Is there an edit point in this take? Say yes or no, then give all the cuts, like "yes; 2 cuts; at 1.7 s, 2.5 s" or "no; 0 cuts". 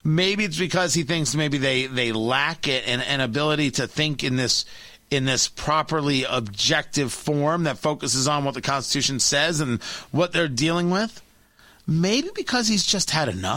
no; 0 cuts